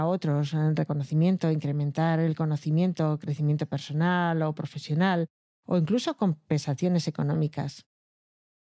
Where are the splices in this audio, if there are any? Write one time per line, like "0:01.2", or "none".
none